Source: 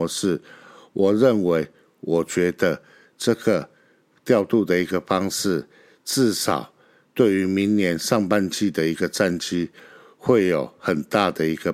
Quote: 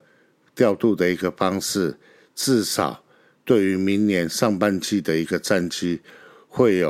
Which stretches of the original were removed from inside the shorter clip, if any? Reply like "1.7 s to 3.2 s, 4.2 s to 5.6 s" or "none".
none